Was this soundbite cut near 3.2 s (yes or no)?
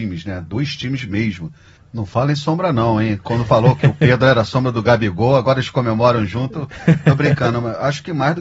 no